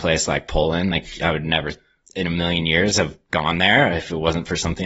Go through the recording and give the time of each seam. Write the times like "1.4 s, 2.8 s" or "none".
none